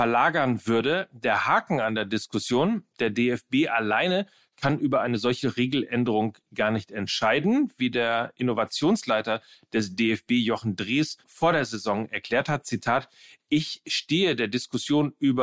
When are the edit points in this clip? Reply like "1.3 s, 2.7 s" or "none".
11.2 s